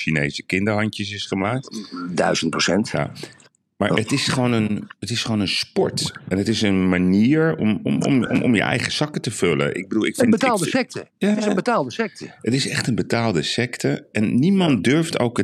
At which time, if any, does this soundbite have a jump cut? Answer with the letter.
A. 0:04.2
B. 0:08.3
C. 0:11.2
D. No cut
D